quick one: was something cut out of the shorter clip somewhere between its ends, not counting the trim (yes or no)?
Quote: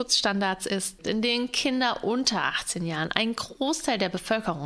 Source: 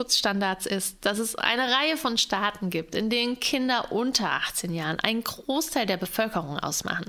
yes